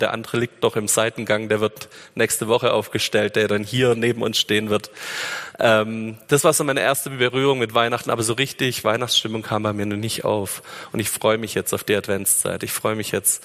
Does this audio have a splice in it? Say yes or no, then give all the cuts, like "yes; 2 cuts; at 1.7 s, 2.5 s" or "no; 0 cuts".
no; 0 cuts